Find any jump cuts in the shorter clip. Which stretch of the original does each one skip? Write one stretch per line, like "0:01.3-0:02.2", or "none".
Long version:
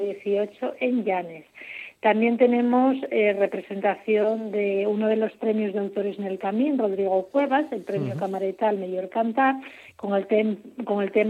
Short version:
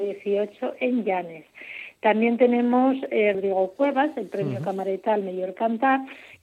0:03.3-0:06.9